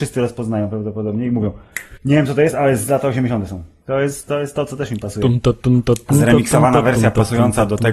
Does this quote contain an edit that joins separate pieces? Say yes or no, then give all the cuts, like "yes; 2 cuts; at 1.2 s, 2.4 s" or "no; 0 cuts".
yes; 2 cuts; at 2.0 s, 3.8 s